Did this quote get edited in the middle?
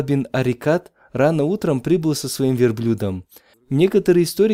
yes; 1 cut; at 3.5 s

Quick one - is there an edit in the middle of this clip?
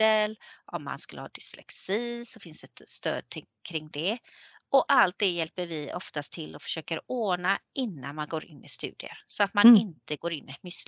no; 0 cuts

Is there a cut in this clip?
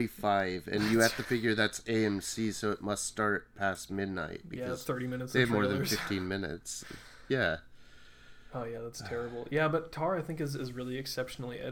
no; 0 cuts

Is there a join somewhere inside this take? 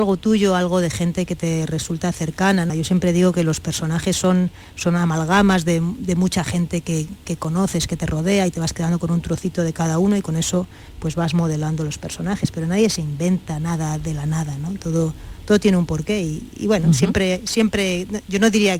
yes; 1 cut; at 2.7 s

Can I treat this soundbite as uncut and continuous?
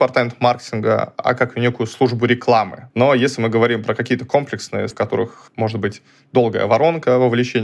no; 2 cuts; at 2.9 s, 4.9 s

